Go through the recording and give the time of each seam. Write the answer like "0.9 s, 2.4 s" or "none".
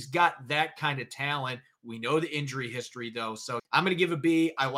3.6 s

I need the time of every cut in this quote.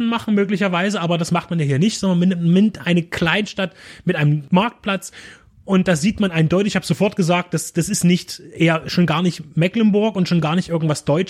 none

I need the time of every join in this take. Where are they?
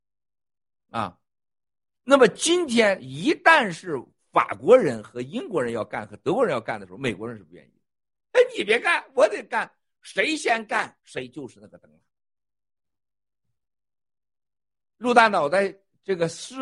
8.3 s, 11.0 s

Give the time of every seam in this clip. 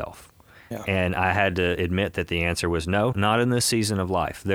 3.1 s

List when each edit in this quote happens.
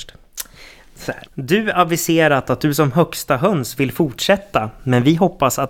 1.3 s

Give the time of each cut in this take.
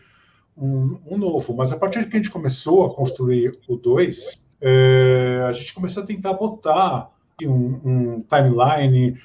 4.5 s, 7.4 s

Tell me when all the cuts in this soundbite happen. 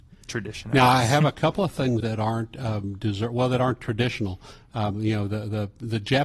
2.0 s

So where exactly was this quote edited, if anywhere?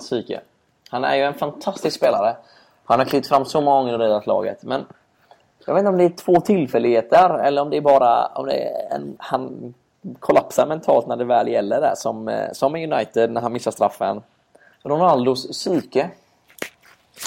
9.2 s, 14.7 s

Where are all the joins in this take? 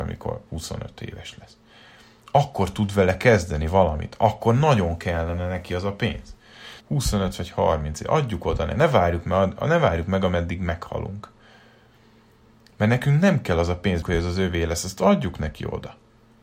6.8 s, 14.0 s

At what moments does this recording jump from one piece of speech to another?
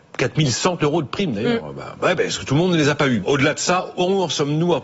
3.2 s

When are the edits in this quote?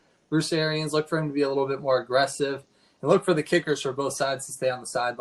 none

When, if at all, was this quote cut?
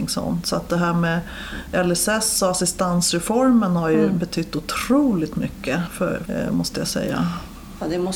6.3 s

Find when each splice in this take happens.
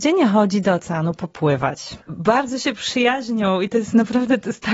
2.0 s

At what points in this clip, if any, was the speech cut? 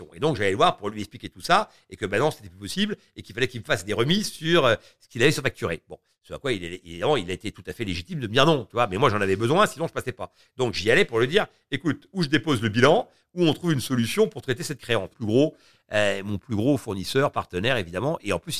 15.1 s

